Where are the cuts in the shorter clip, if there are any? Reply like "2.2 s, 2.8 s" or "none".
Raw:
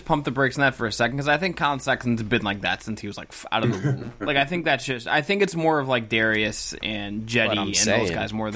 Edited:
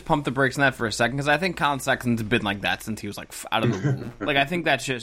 none